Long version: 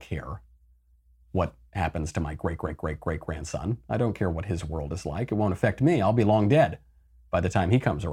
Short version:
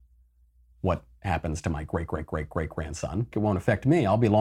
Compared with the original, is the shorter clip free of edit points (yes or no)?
no